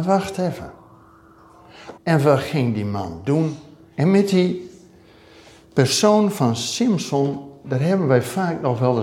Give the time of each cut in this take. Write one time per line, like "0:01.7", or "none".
0:02.0
0:03.9